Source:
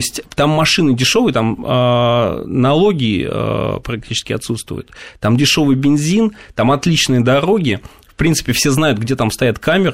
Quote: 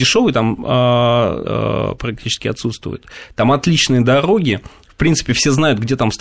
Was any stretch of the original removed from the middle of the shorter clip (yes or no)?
yes